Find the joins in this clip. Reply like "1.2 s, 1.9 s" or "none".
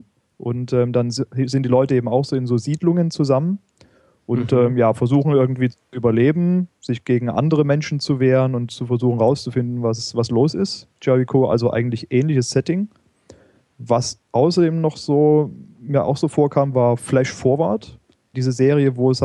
18.3 s